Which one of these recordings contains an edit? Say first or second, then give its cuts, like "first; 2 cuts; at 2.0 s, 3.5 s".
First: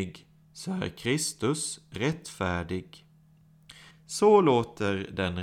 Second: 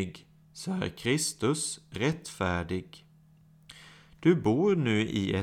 first; 1 cut; at 3.9 s